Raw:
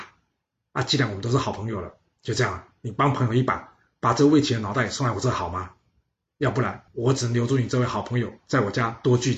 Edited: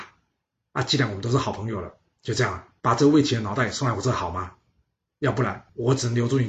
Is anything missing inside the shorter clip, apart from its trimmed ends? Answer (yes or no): yes